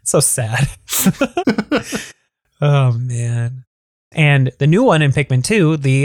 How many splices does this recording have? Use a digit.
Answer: 1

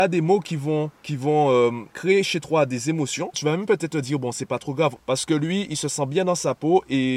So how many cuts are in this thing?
2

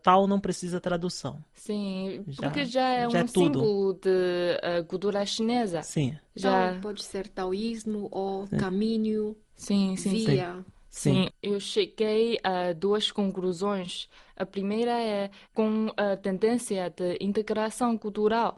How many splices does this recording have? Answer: 1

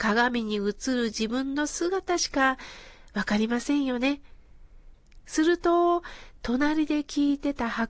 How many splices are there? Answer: 1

